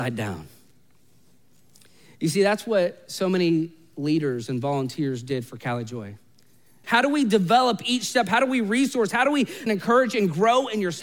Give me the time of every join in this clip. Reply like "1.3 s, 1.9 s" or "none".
6.8 s, 9.7 s